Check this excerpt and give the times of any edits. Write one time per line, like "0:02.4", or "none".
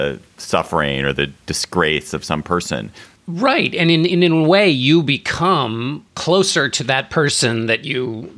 0:03.2
0:06.1